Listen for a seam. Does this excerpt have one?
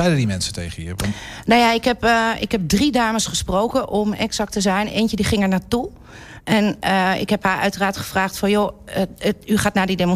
no; 0 cuts

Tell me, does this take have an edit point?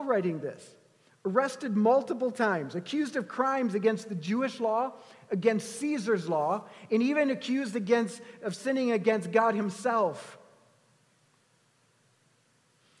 no; 0 cuts

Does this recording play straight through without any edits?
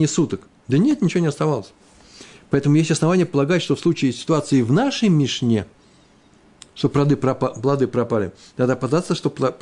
yes; 0 cuts

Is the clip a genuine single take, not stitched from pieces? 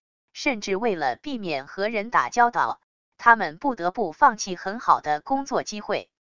yes; 0 cuts

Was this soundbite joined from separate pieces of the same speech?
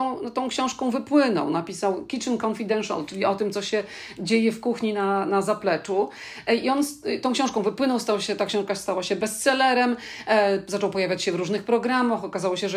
no; 0 cuts

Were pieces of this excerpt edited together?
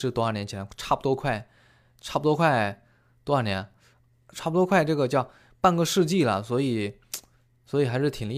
no; 0 cuts

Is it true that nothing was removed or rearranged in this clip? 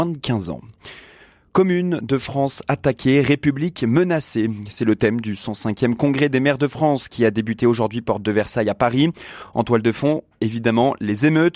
yes; 0 cuts

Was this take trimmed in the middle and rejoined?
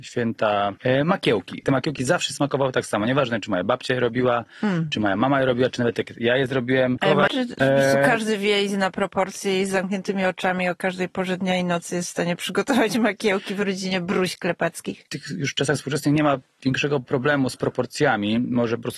yes; 1 cut; at 7.3 s

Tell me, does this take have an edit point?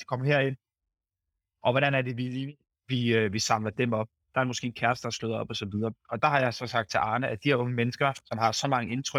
no; 0 cuts

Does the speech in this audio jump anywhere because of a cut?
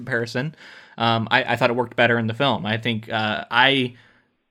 no; 0 cuts

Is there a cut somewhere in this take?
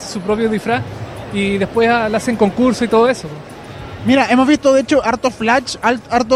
no; 0 cuts

